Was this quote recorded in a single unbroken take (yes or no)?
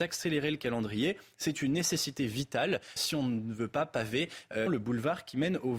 no